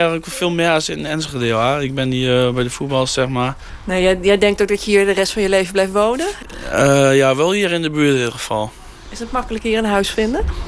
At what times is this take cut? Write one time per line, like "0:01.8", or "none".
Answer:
none